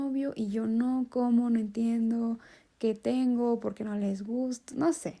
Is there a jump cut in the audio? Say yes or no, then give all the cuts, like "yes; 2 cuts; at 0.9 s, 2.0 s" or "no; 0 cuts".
no; 0 cuts